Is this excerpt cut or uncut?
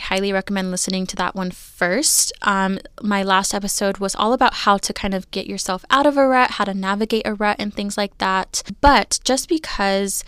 uncut